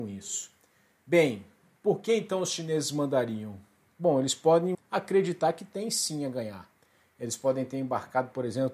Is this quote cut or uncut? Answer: cut